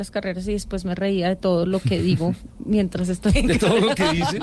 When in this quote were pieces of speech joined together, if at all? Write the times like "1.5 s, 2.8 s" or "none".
none

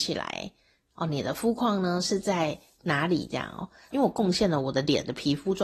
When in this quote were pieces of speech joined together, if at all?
3.9 s

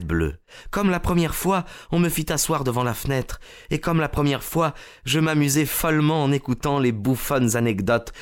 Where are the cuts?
none

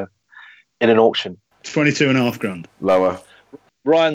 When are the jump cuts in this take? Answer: 1.5 s

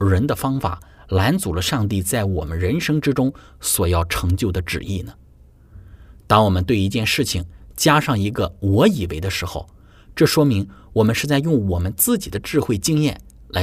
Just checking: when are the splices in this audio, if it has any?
none

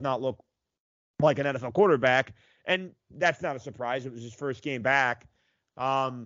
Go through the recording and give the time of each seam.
none

